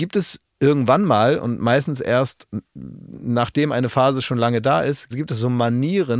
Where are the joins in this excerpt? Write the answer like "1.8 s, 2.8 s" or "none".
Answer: 5.1 s